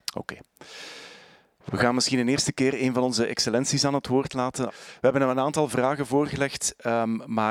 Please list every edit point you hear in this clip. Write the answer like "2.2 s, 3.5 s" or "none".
4.7 s